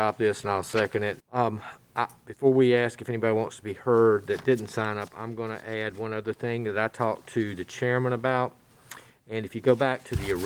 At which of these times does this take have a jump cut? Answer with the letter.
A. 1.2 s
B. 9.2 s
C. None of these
A